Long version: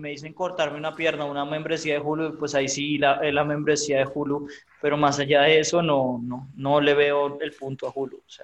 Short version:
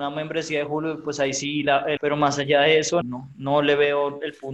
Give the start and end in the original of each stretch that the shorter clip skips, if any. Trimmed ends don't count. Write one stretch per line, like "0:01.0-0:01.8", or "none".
0:03.3-0:04.8
0:05.8-0:06.2